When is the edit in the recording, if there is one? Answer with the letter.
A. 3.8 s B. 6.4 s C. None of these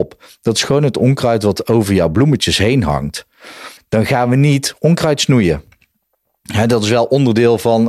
A